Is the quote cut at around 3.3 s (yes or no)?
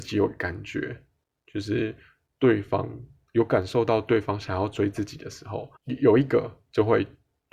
no